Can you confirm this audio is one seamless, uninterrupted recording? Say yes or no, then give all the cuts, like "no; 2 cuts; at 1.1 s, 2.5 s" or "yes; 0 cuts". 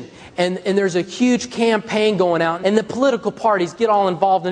no; 1 cut; at 2.6 s